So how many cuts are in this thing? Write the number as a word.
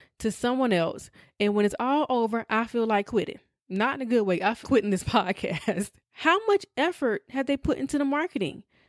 two